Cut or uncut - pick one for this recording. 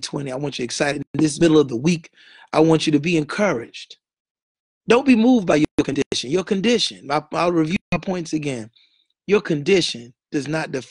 uncut